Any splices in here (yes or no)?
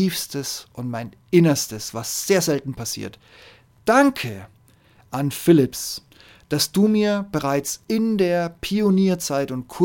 no